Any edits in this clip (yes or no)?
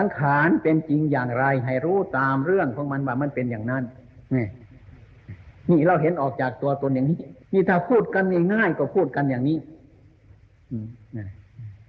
yes